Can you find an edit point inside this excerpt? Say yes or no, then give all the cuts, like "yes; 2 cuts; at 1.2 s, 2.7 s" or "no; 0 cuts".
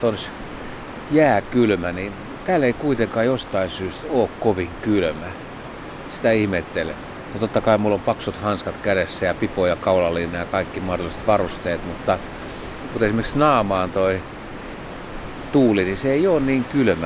no; 0 cuts